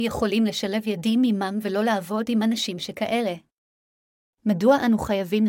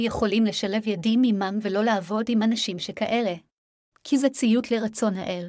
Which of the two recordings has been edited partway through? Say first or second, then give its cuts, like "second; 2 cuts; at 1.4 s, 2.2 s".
second; 1 cut; at 3.9 s